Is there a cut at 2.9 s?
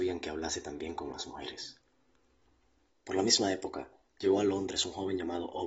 yes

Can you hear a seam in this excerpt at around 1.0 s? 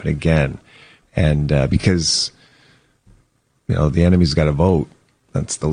yes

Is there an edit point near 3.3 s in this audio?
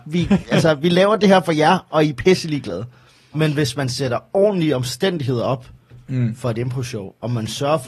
yes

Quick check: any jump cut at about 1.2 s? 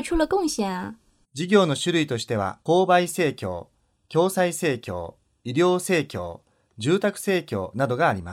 yes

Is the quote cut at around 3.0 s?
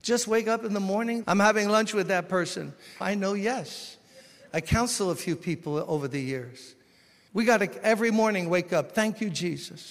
yes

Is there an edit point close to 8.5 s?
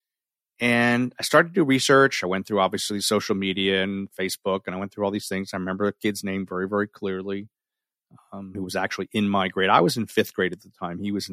yes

